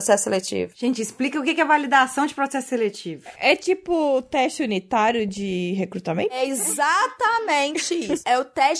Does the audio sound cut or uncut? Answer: uncut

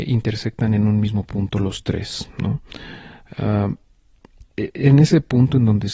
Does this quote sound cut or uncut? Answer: cut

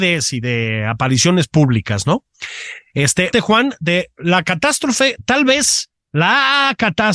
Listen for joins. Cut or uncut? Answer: cut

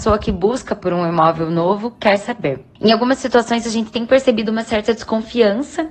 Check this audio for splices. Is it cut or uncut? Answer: uncut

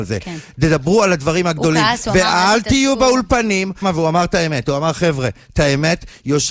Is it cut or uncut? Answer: cut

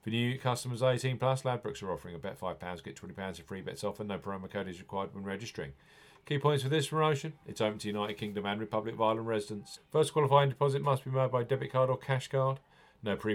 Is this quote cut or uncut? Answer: cut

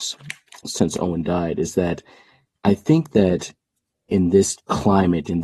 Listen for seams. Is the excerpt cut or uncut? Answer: uncut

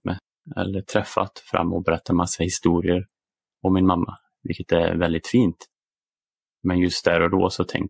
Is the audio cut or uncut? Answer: uncut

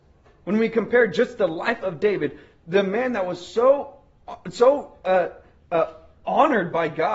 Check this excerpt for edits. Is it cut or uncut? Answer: uncut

